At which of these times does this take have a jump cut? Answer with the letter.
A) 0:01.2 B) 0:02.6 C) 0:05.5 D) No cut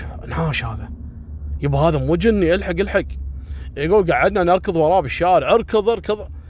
D